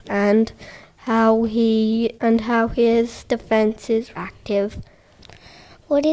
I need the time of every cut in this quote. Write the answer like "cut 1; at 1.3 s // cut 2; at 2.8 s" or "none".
cut 1; at 2.2 s // cut 2; at 4.2 s